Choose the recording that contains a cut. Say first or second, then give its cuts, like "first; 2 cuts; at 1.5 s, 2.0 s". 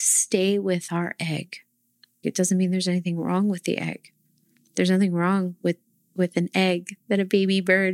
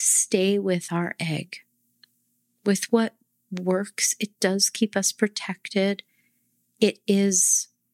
first; 1 cut; at 2.2 s